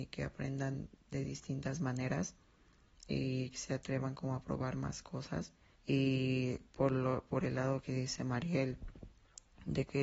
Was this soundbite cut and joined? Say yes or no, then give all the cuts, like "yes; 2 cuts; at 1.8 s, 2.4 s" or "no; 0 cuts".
yes; 1 cut; at 5.7 s